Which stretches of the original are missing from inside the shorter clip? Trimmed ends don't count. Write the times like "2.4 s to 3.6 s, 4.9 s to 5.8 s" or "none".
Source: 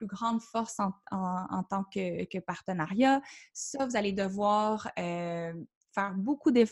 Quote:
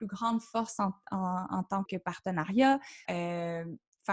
1.8 s to 2.3 s, 3.5 s to 4.9 s

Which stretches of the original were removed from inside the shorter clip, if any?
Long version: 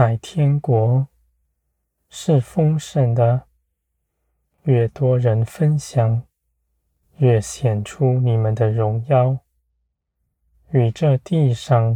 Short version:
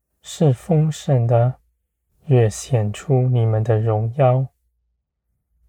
4.0 s to 7.0 s

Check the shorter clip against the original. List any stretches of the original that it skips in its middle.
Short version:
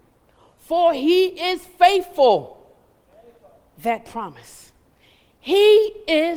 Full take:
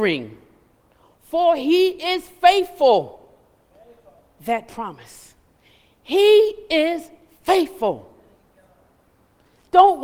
none

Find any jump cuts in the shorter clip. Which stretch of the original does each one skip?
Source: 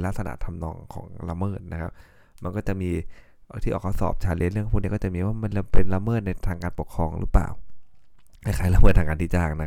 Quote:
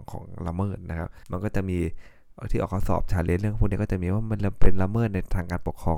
2.1 s to 2.4 s

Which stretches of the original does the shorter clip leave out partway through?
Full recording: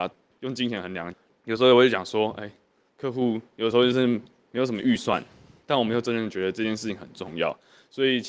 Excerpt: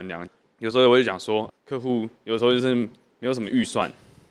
2.4 s to 2.8 s

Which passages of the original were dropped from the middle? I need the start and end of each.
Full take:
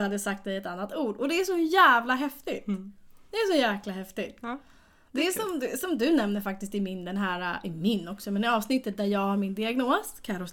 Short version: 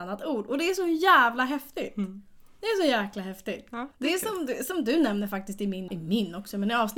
4.6 s to 5.0 s, 7.0 s to 7.6 s

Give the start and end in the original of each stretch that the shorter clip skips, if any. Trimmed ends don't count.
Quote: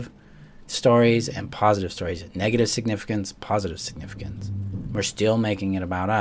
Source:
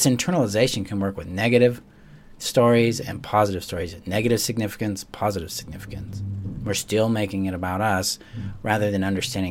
none

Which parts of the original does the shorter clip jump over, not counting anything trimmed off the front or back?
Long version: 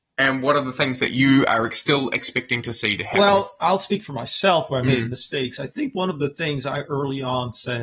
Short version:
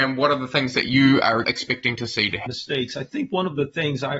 1.7 s to 2.1 s, 3.1 s to 5.1 s

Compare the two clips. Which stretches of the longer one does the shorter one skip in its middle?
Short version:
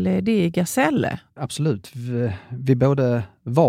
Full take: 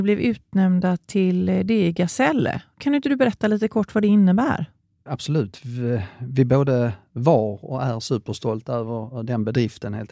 2.7 s to 5.0 s

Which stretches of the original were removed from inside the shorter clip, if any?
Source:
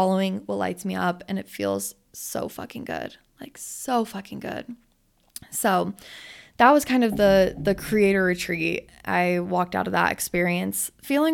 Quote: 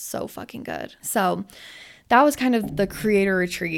3.2 s to 5.5 s, 7.2 s to 7.6 s

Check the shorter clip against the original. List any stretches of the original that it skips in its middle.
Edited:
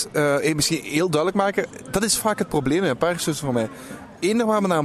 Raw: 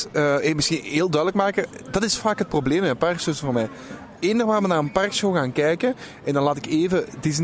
none

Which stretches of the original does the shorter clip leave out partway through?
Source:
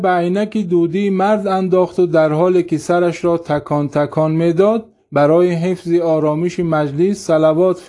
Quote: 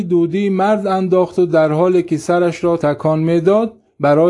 3.4 s to 3.9 s

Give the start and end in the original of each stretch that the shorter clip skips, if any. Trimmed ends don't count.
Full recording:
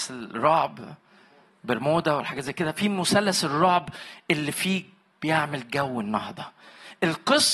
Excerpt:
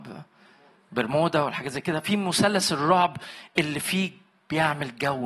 none

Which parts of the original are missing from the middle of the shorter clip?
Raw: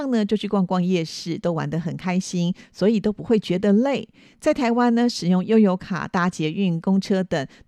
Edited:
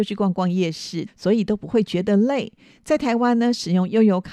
1.4 s to 2.6 s

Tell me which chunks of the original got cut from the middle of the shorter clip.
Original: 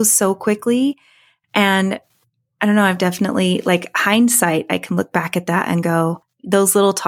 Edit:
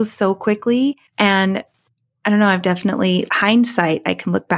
1.1 s to 1.4 s, 3.6 s to 3.9 s

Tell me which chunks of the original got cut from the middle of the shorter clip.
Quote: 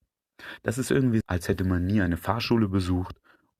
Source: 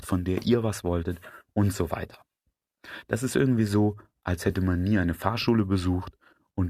3.7 s to 4.2 s

